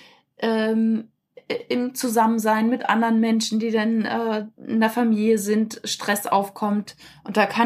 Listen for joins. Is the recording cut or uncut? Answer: uncut